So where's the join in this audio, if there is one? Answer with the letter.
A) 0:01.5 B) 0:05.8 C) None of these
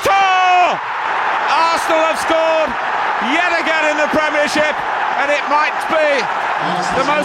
B